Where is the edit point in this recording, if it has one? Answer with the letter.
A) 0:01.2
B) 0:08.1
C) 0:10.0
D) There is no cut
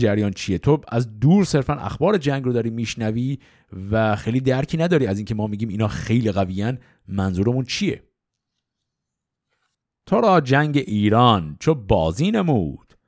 D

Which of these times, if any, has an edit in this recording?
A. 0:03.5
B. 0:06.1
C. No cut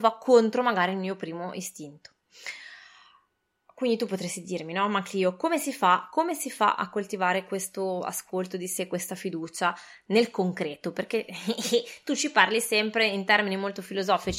C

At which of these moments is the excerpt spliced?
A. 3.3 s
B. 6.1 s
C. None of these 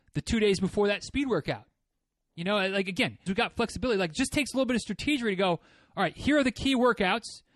A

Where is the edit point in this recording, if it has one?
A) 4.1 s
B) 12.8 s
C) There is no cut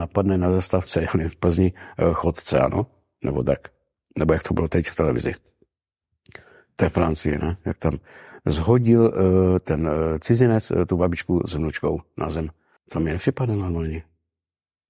B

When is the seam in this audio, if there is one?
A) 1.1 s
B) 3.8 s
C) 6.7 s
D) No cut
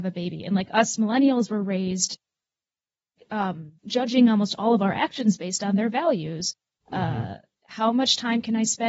B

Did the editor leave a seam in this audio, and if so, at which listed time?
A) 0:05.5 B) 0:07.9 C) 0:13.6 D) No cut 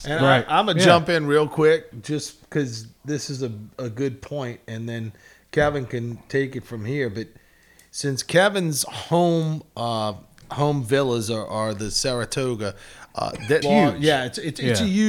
C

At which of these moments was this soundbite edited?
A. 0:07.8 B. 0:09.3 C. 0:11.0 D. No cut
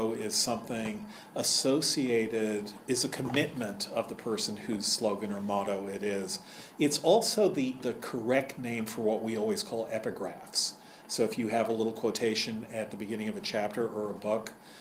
A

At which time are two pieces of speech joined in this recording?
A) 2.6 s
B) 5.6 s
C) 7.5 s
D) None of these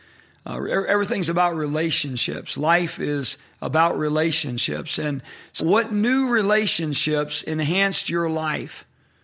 B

